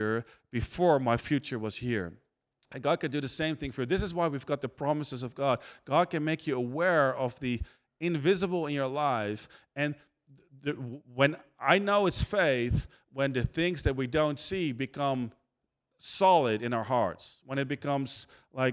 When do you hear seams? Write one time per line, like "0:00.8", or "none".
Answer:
none